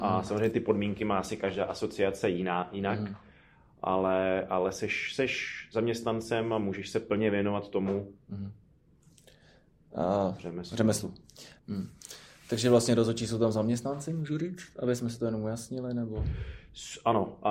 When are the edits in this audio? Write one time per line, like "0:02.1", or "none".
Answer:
0:11.6